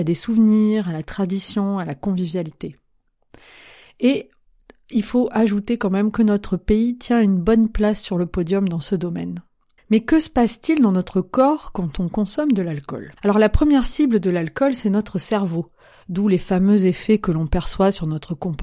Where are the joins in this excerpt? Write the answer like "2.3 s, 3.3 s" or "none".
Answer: 9.8 s, 13.2 s

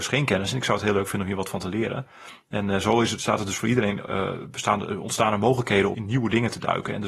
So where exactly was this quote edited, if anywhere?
5.9 s

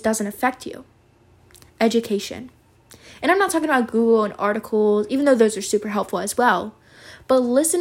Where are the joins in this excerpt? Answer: none

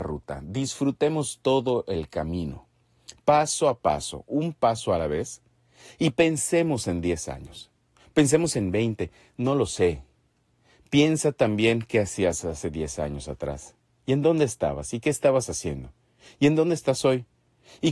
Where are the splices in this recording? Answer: none

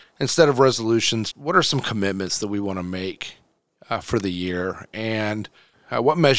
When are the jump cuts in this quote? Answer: 1.3 s

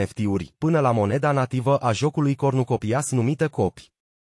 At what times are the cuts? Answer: none

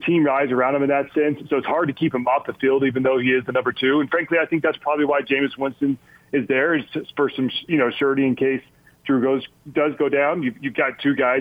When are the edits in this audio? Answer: none

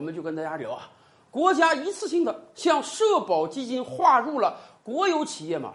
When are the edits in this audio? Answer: 4.8 s

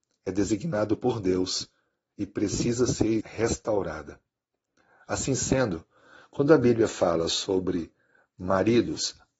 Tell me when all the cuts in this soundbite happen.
3.2 s

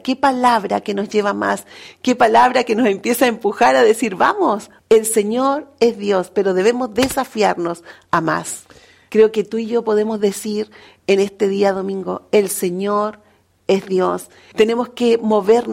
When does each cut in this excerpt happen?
4.8 s, 9.1 s, 14.5 s

